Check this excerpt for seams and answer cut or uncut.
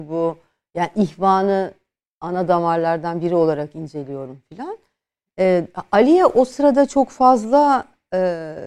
uncut